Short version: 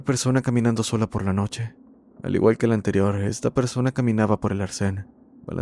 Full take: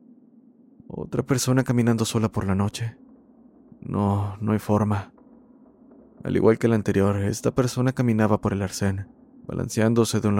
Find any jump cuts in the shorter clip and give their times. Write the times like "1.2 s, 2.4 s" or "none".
2.1 s